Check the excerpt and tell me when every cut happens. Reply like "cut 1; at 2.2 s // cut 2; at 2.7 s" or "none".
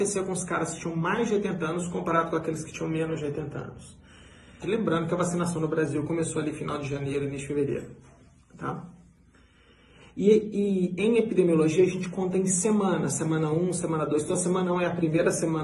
cut 1; at 4.6 s